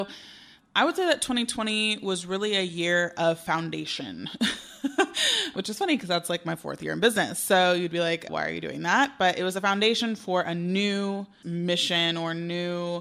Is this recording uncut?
no; 2 cuts; at 8.3 s, 11.4 s

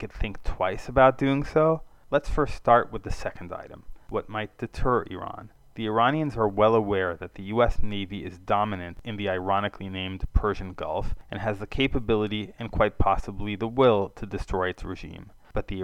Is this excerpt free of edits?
yes; 0 cuts

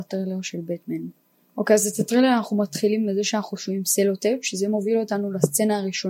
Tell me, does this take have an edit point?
no; 0 cuts

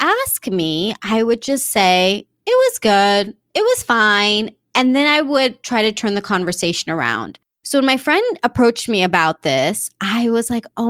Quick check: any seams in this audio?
no; 0 cuts

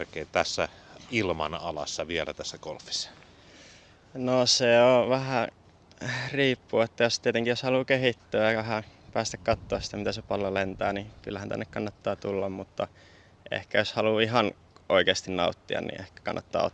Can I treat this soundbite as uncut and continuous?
yes; 0 cuts

